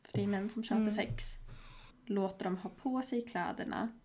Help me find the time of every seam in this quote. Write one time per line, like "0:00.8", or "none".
0:01.9